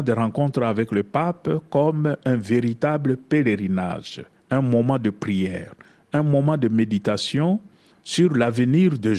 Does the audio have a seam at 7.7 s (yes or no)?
no